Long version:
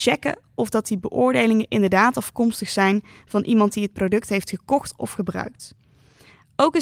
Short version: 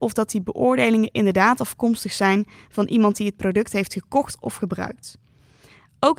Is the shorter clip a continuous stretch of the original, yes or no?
yes